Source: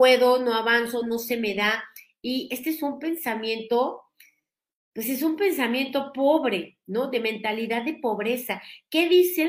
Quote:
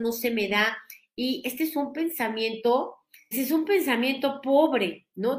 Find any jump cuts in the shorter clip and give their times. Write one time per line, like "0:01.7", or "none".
0:03.3